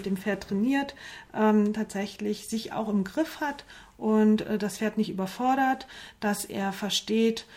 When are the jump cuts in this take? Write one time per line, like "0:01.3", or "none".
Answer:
none